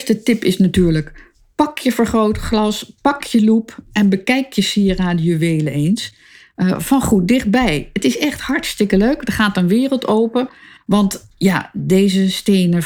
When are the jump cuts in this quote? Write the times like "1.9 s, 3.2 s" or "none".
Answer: 10.8 s